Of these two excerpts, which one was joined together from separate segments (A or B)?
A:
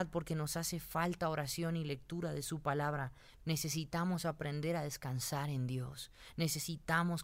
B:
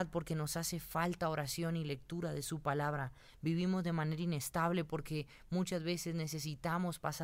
A